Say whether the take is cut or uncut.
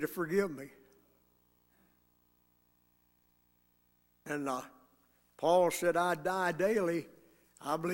uncut